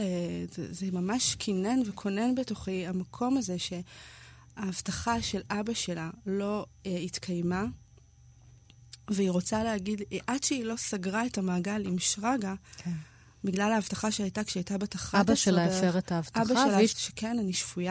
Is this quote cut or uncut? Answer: cut